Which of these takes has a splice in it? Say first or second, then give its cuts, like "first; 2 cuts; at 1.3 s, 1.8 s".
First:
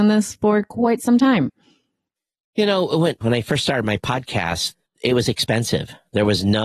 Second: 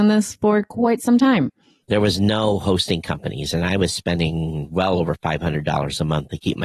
second; 1 cut; at 1.8 s